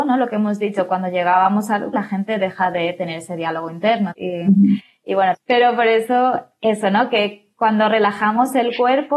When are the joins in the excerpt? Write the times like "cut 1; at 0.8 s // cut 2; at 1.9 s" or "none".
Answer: cut 1; at 1.9 s // cut 2; at 4.1 s // cut 3; at 5.3 s